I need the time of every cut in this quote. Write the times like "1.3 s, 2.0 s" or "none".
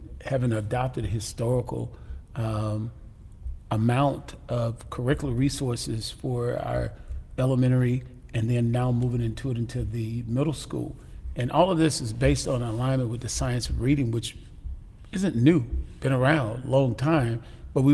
none